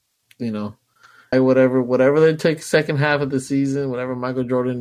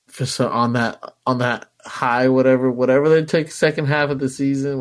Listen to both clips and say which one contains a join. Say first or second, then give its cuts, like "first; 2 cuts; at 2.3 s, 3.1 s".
first; 1 cut; at 1.3 s